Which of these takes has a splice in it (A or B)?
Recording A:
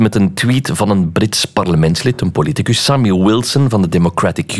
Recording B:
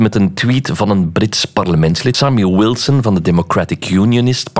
B